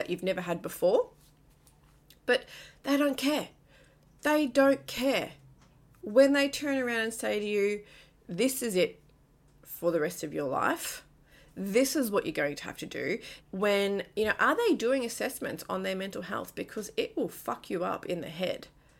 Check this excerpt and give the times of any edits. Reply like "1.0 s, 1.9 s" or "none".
13.4 s